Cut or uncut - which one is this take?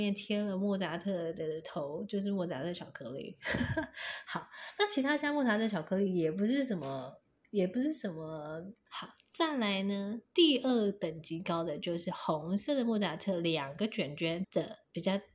cut